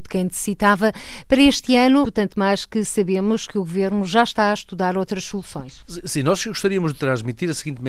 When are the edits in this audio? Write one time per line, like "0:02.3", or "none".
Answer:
0:02.0